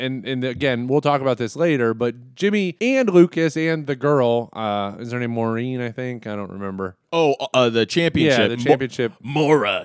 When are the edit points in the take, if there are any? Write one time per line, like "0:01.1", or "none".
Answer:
none